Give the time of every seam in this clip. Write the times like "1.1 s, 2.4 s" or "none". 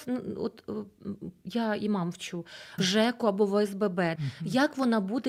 2.8 s, 4.1 s